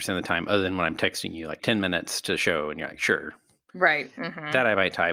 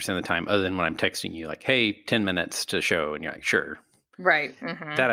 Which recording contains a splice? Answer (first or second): first